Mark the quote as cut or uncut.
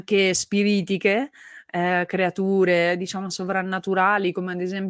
uncut